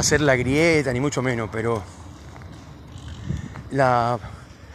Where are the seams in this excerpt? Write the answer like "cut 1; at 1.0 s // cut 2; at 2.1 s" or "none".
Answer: cut 1; at 3.7 s